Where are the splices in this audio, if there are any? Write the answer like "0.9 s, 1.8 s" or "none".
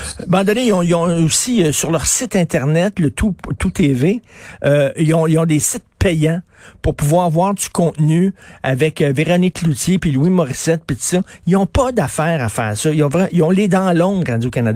none